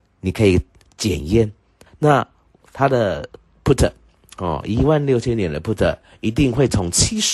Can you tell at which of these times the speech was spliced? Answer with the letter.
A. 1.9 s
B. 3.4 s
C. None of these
A